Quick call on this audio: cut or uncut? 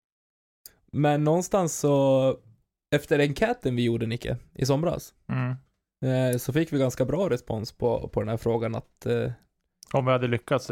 uncut